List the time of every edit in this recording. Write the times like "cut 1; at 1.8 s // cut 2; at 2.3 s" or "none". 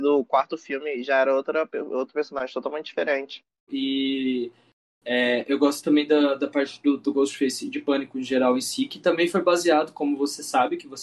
cut 1; at 3.7 s

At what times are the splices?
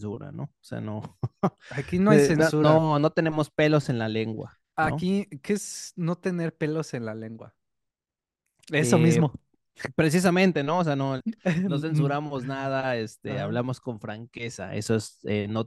cut 1; at 11.2 s

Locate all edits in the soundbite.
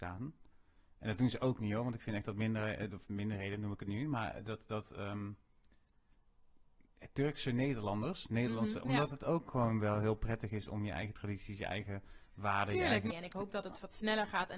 cut 1; at 8.8 s // cut 2; at 13.1 s

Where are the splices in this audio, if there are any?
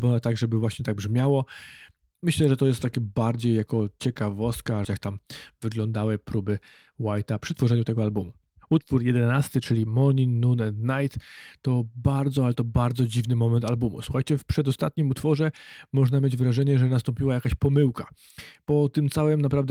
cut 1; at 4.8 s

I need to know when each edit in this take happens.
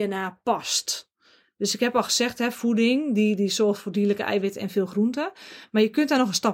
none

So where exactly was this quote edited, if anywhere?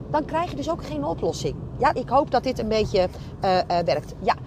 cut 1; at 1.9 s

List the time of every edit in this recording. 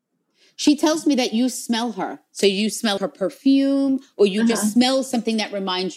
cut 1; at 3.0 s

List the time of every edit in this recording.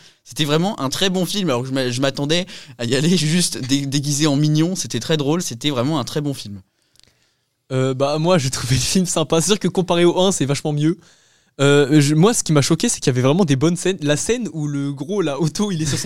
cut 1; at 5.4 s

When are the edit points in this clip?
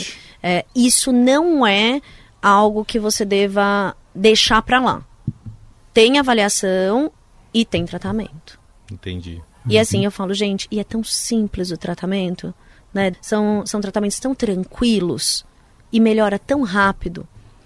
cut 1; at 13.1 s

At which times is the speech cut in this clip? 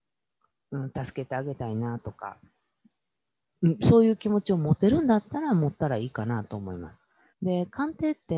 cut 1; at 7.3 s

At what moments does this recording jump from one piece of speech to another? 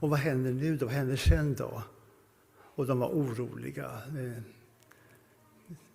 none

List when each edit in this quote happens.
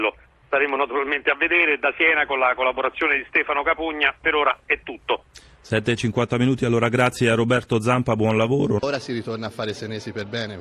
cut 1; at 8.8 s

